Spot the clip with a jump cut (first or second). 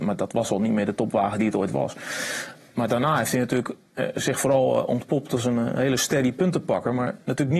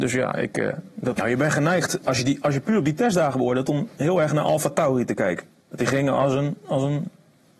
second